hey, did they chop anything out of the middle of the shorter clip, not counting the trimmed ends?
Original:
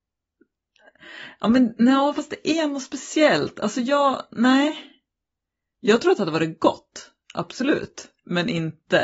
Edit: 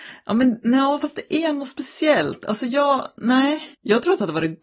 yes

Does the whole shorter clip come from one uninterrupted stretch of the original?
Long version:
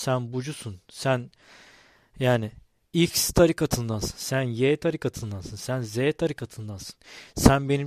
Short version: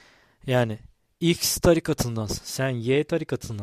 yes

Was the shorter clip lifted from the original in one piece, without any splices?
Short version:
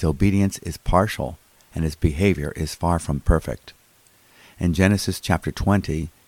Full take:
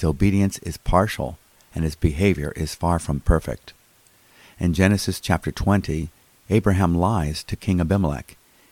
yes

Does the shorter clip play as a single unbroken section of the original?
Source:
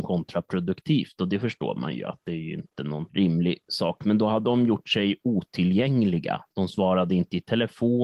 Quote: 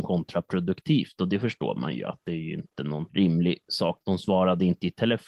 no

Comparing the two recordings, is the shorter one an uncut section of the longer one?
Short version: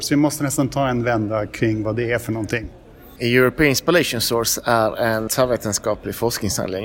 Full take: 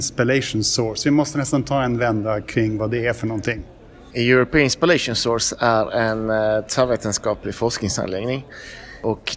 no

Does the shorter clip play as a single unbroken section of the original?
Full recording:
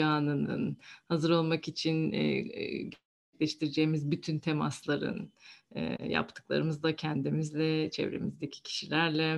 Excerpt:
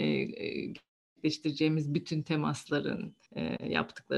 no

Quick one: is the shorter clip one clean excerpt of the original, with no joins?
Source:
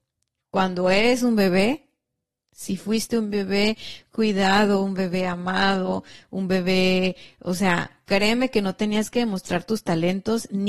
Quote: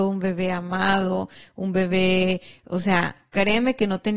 yes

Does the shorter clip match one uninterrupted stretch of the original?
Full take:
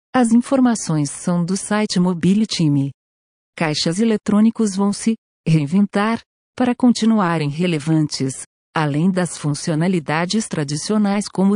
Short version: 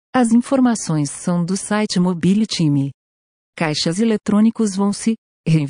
yes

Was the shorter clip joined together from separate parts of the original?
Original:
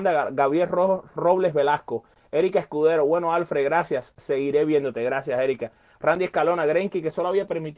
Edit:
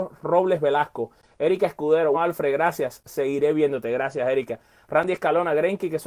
yes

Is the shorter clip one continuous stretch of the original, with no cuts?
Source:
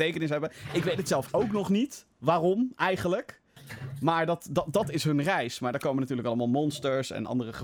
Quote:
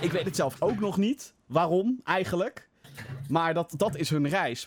no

